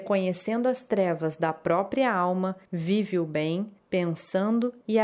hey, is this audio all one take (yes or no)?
yes